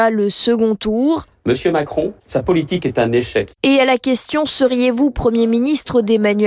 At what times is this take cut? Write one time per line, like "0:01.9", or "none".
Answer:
none